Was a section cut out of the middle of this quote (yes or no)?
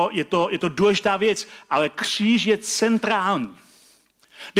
no